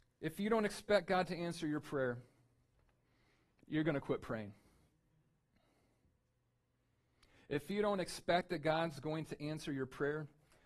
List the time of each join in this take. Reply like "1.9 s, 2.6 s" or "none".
none